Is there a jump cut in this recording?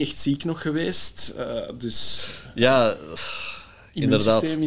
no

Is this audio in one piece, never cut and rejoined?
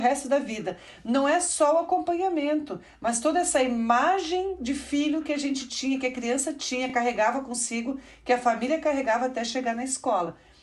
yes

